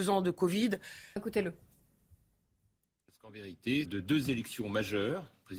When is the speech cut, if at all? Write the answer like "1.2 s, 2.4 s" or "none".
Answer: 1.2 s, 3.9 s

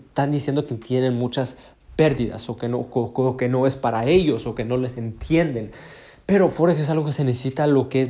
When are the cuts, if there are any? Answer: none

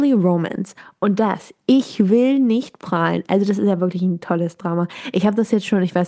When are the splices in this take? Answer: none

